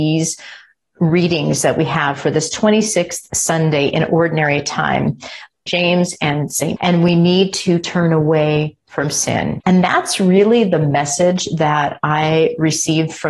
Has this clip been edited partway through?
yes; 3 cuts; at 5.7 s, 6.8 s, 9.6 s

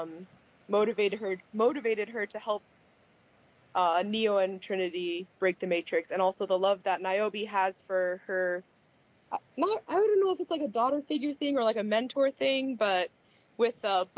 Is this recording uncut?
yes; 0 cuts

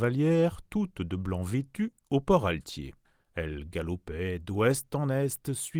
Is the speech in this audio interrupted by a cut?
no; 0 cuts

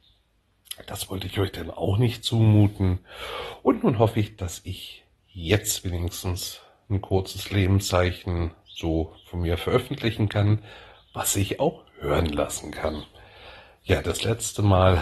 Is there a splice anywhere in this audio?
no; 0 cuts

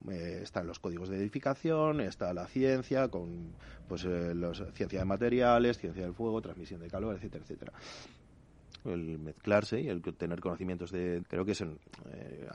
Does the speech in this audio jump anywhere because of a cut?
yes; 2 cuts; at 8.8 s, 11.2 s

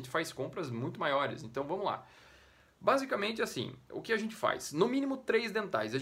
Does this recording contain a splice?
no; 0 cuts

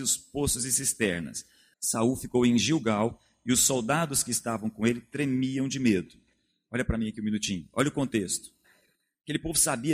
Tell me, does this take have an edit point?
yes; 1 cut; at 1.7 s

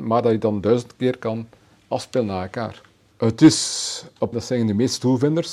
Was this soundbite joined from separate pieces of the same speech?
yes; 2 cuts; at 3.1 s, 4.3 s

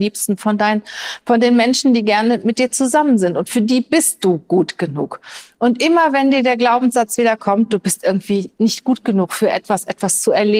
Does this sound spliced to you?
no; 0 cuts

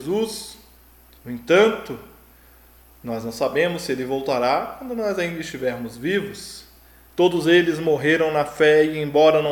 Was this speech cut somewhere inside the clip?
yes; 2 cuts; at 1.2 s, 7.1 s

